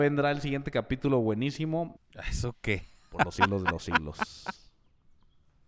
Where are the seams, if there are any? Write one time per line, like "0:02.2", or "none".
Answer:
0:02.0